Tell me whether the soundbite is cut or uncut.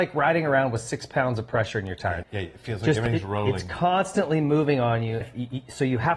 cut